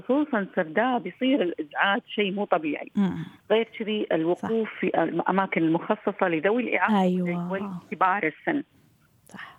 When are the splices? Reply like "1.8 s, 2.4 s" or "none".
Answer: 3.4 s